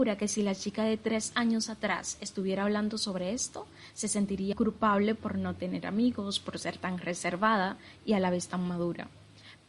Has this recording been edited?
yes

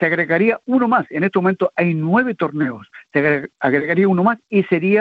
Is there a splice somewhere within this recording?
no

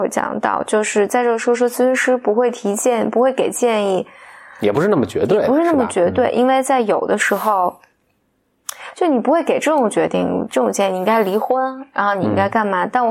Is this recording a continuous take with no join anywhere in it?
yes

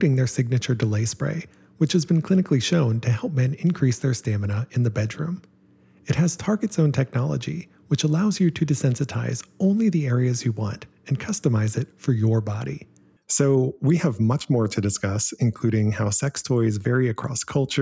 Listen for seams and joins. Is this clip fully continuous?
no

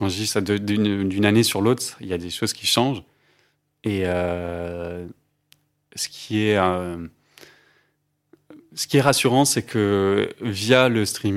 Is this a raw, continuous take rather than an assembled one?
yes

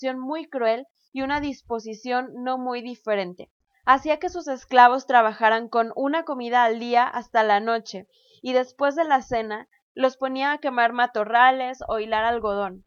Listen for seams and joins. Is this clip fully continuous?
yes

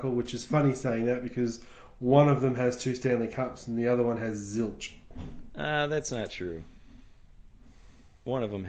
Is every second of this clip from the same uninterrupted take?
yes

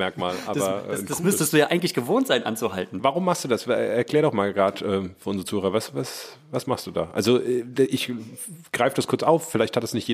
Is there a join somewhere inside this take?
no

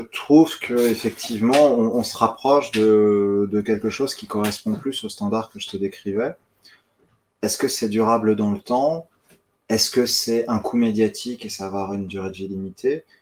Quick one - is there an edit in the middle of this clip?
no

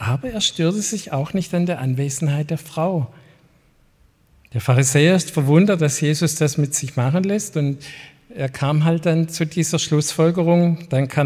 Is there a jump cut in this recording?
no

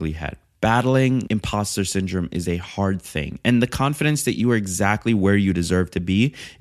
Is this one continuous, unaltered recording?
yes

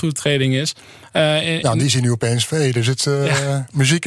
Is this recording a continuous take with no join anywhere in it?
yes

